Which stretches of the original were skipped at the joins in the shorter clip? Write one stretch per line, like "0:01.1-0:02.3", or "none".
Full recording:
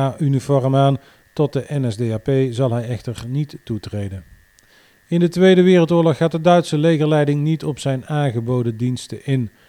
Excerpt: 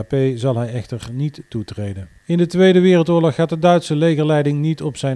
0:04.3-0:05.0